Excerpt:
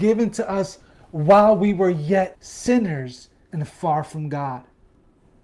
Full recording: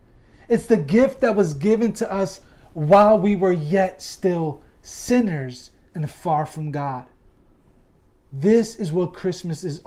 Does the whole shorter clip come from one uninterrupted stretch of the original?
no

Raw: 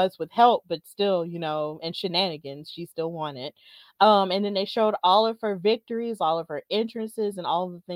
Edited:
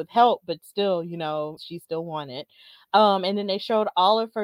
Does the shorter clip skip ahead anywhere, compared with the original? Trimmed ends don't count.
yes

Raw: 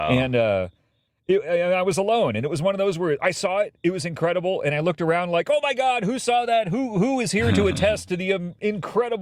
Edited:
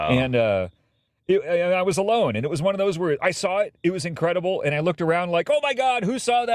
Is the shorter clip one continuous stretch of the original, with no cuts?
yes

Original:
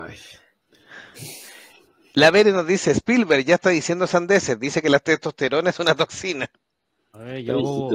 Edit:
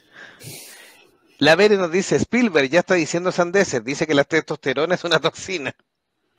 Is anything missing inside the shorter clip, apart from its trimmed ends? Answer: no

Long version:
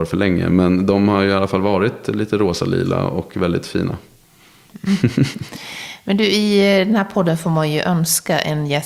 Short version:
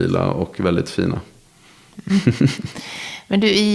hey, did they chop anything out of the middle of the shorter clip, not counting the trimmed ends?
no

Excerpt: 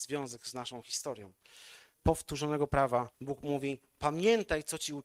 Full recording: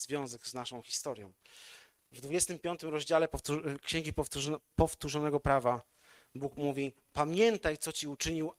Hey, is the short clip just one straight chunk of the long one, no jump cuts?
no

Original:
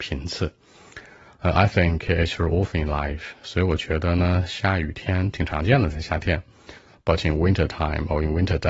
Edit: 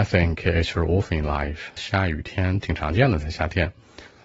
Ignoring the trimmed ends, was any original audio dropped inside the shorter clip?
yes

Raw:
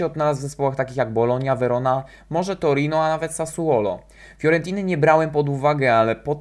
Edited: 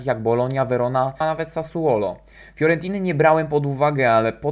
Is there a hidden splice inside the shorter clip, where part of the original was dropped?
yes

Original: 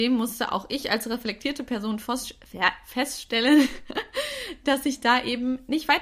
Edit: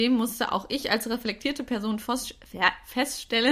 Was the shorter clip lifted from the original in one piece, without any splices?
yes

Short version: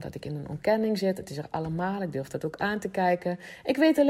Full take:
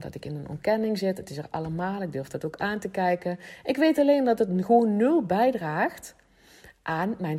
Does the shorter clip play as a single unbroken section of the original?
yes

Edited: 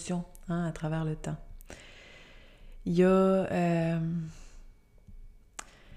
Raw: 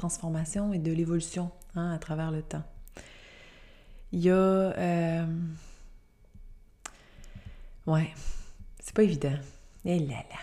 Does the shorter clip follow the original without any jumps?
yes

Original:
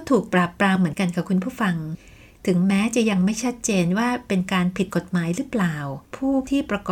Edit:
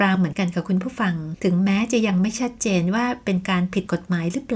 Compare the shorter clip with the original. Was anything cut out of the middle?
yes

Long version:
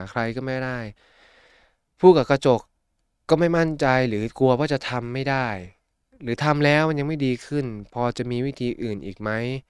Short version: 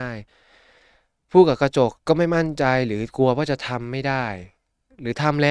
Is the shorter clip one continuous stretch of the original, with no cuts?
no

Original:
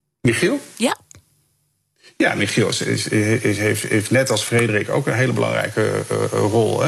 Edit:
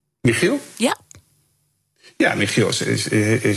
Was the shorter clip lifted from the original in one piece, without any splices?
yes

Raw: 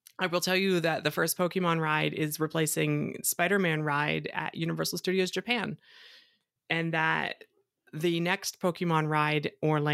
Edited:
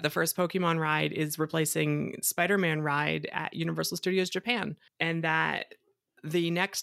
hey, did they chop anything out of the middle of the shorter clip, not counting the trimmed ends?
yes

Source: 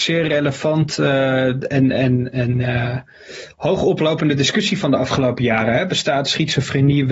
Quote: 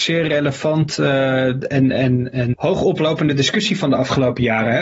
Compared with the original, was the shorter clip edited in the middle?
yes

